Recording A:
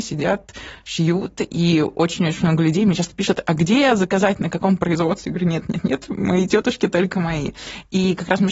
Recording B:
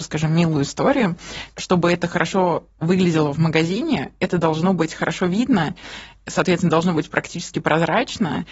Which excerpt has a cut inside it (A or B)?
B